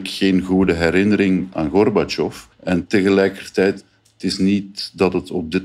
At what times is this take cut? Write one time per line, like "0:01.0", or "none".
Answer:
0:02.5